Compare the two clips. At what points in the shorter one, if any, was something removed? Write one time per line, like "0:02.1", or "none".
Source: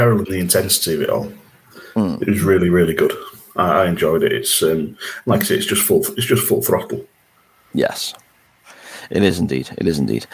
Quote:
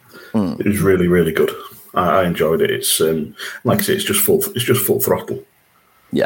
none